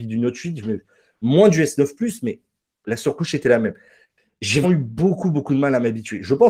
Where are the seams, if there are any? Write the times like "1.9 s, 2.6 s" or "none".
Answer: 4.6 s